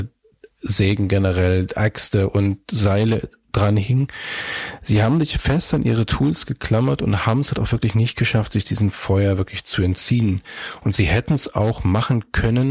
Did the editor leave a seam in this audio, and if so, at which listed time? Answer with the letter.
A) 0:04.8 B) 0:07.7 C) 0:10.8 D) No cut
D